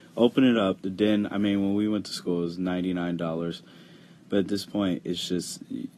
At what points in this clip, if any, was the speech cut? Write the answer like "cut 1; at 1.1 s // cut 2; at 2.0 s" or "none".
none